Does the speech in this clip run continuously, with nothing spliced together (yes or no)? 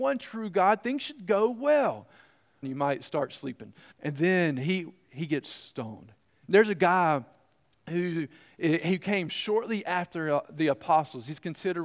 no